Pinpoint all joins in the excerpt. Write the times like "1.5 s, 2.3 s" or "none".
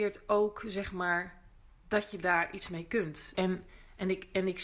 3.3 s